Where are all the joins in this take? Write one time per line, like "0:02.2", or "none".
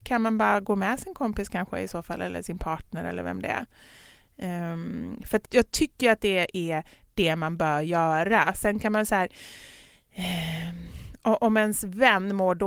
0:05.4